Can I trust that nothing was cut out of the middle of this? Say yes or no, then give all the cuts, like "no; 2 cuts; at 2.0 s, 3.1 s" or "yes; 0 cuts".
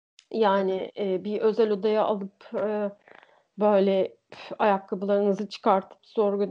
yes; 0 cuts